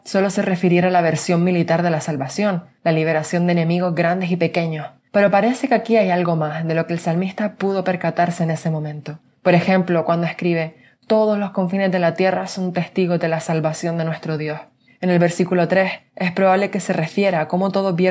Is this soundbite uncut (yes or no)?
yes